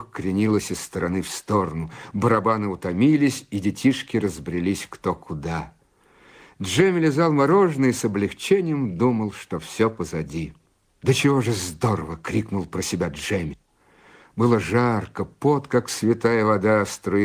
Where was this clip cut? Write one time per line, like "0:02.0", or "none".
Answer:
0:10.9